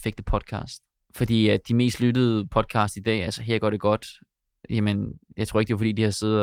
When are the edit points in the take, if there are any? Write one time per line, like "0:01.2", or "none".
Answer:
none